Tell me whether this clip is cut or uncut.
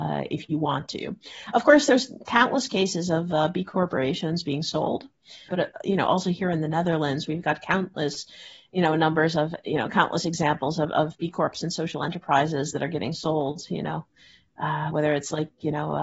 cut